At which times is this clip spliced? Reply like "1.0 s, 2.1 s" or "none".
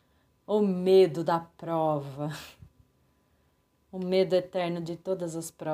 none